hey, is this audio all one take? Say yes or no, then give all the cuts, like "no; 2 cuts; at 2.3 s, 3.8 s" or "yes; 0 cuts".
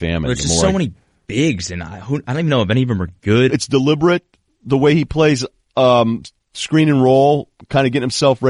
no; 1 cut; at 3.5 s